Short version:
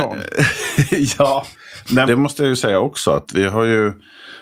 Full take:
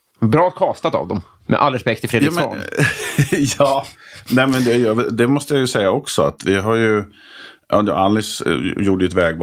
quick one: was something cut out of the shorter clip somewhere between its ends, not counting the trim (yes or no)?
yes